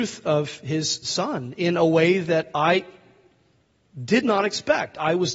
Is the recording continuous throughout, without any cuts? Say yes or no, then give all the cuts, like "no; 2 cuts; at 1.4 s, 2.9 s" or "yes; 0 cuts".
yes; 0 cuts